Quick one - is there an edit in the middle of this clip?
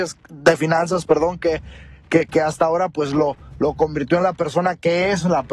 no; 0 cuts

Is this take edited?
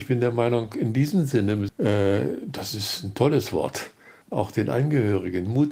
yes; 2 cuts; at 1.7 s, 4.2 s

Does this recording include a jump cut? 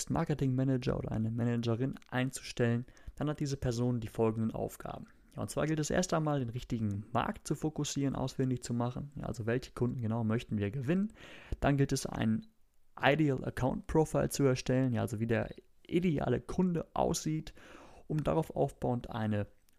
no; 0 cuts

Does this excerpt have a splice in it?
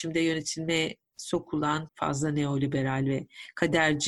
yes; 1 cut; at 1.9 s

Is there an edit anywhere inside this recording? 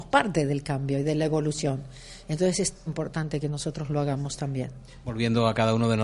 yes; 1 cut; at 2.9 s

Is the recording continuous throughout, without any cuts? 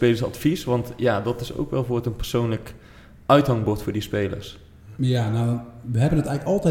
yes; 0 cuts

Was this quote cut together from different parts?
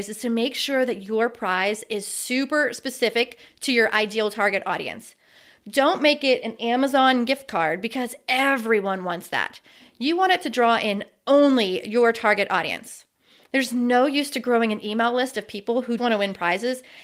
yes; 1 cut; at 16.0 s

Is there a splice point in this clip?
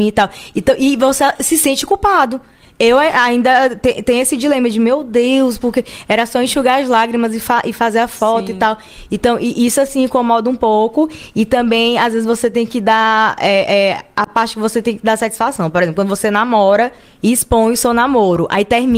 no; 0 cuts

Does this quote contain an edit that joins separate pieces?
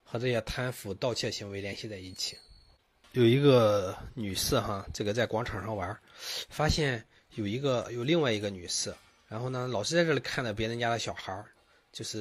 yes; 1 cut; at 3.0 s

